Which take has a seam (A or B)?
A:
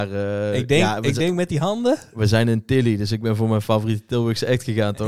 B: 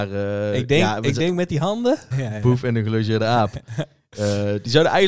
B